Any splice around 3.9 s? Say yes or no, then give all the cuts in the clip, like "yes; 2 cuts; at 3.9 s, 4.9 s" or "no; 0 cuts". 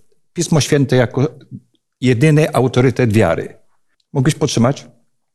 yes; 1 cut; at 3.9 s